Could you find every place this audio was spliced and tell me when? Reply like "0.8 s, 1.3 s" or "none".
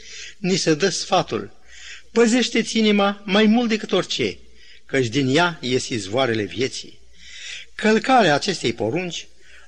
none